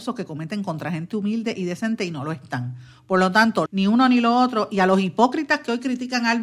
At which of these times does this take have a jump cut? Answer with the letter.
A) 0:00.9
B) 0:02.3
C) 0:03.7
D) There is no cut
C